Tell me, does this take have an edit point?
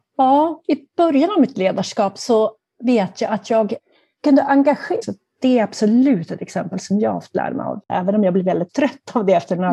yes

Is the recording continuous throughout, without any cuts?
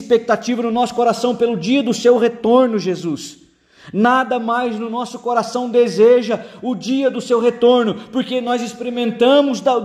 yes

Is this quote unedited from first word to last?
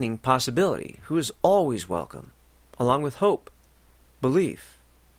yes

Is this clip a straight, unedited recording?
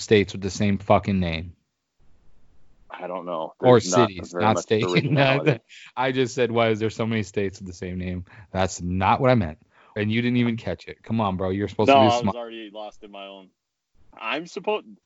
no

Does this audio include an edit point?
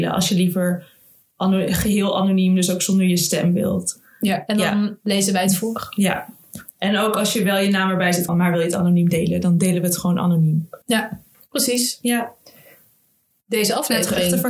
yes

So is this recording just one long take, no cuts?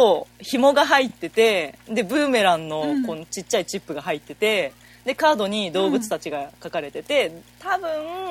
yes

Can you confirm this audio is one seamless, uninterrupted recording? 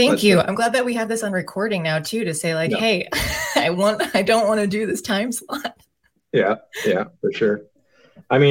yes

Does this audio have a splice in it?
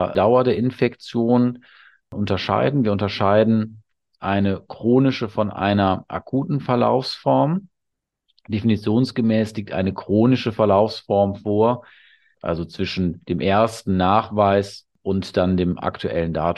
yes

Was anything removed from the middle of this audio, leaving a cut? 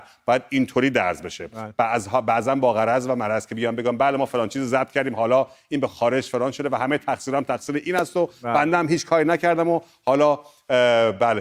no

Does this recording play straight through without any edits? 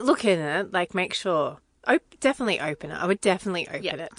yes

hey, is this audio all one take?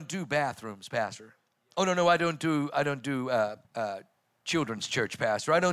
no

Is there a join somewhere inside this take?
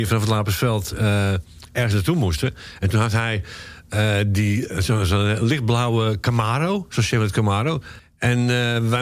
no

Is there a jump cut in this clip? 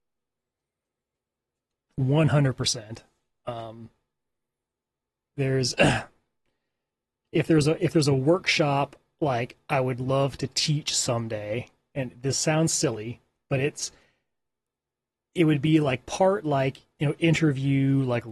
no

